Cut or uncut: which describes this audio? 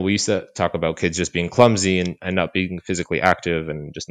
uncut